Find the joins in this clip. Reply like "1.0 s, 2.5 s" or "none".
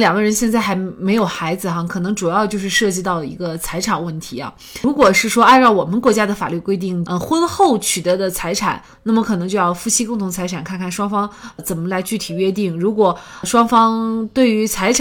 7.1 s